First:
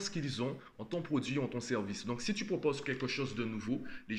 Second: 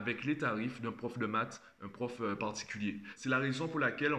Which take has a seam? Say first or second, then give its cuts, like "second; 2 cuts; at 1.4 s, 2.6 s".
second; 1 cut; at 3.2 s